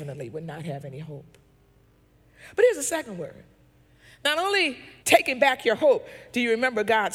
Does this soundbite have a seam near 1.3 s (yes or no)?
no